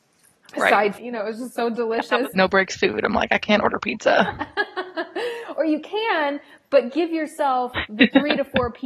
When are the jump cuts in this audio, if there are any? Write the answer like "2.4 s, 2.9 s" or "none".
1.0 s, 2.3 s